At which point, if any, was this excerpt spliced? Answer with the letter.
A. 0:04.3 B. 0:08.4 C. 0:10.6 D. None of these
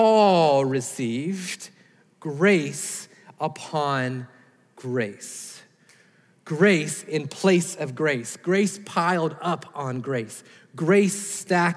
D